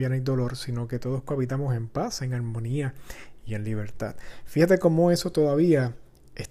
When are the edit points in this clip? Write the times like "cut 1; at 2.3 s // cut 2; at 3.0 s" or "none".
none